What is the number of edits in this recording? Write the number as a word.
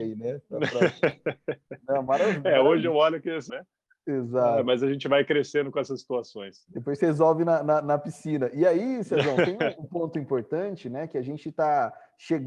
one